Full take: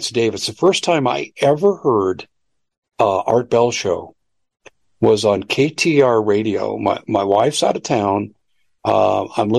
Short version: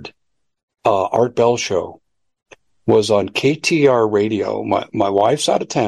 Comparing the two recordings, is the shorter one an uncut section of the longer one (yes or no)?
yes